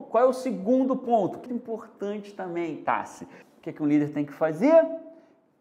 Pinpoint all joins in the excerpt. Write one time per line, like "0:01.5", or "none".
0:01.5
0:03.4